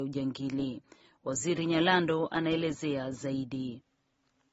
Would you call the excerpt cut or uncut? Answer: uncut